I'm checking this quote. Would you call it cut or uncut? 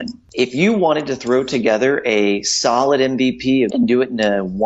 cut